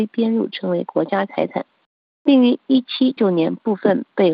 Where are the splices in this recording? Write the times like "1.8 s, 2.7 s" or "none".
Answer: 3.2 s